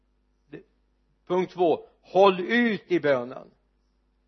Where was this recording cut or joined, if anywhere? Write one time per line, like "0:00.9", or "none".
none